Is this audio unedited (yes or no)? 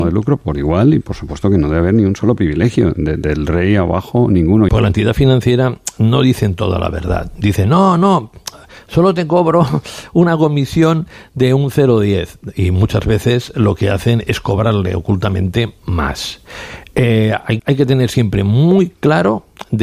no